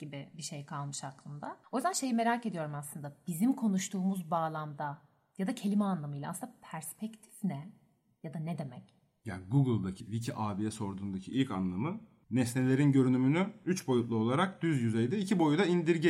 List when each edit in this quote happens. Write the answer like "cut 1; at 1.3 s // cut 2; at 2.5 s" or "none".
cut 1; at 10.0 s

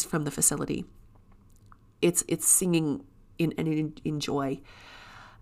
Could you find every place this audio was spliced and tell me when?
cut 1; at 3.5 s

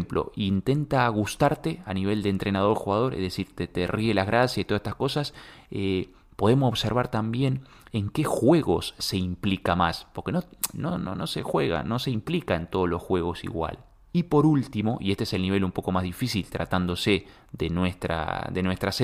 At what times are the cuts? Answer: cut 1; at 14.1 s

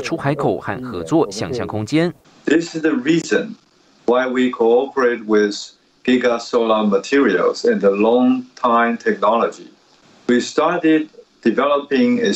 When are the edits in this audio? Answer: none

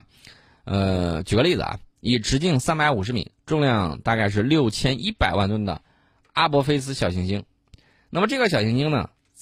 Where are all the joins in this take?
none

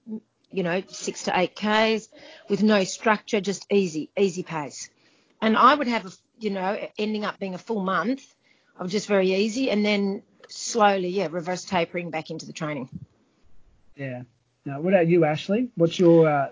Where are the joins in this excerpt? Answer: cut 1; at 13.8 s

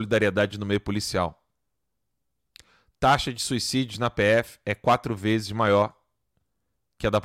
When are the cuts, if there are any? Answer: none

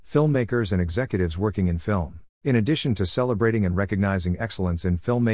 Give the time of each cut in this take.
cut 1; at 2.3 s

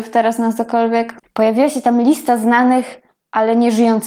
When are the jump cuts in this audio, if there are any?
cut 1; at 1.2 s

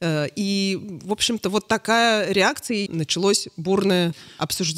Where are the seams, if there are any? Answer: cut 1; at 2.9 s

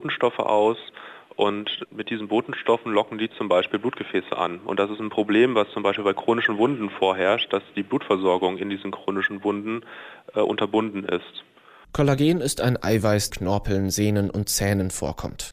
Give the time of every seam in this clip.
cut 1; at 11.8 s // cut 2; at 13.3 s

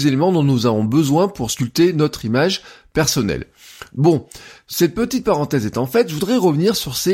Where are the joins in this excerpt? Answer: cut 1; at 3.9 s

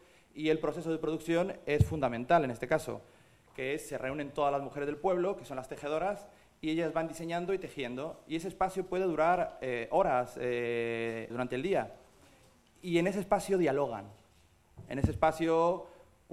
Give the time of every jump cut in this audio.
cut 1; at 11.3 s

